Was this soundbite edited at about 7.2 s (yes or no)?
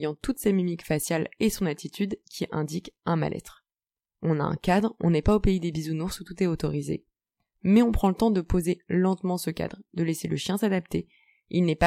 no